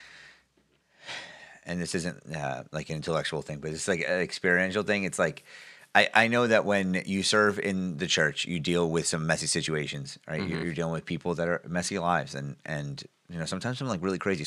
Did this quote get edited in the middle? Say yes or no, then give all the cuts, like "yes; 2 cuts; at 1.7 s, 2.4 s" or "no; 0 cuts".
no; 0 cuts